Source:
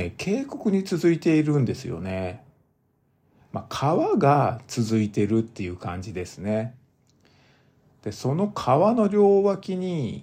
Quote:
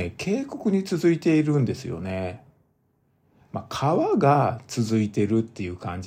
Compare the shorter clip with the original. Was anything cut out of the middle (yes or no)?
no